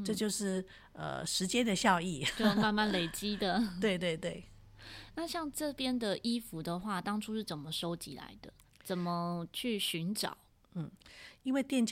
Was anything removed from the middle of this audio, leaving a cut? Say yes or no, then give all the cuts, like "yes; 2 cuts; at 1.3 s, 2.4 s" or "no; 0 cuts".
no; 0 cuts